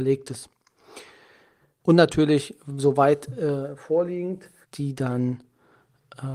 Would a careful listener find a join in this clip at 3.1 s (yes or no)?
no